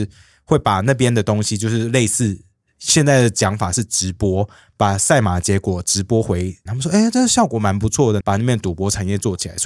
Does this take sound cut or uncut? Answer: cut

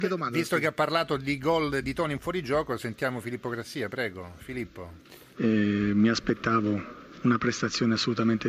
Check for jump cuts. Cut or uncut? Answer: cut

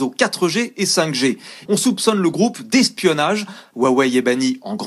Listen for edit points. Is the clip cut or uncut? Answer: cut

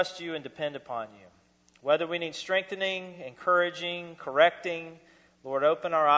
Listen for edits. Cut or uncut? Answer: uncut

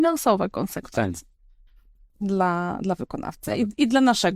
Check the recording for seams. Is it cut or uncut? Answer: uncut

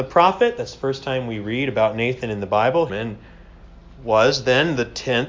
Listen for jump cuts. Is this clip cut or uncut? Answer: cut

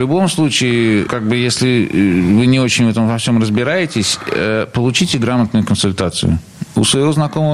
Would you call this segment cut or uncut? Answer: cut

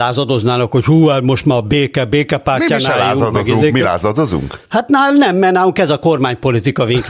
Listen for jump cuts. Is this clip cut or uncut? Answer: cut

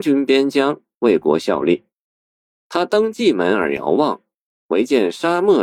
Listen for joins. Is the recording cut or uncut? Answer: uncut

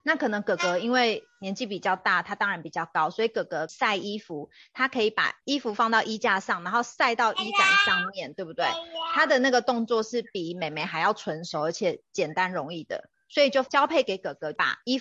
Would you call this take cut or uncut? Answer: uncut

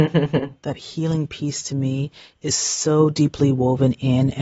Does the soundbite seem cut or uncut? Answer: uncut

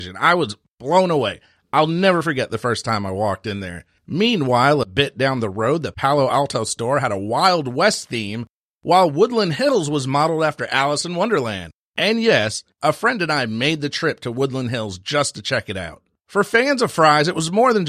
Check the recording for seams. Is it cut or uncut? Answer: uncut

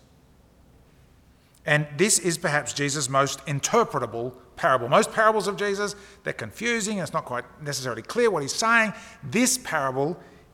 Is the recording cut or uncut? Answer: uncut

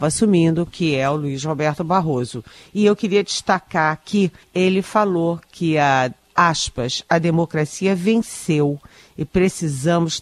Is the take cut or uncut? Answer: cut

